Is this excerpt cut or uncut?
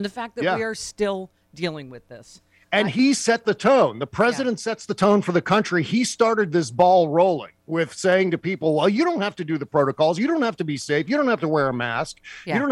uncut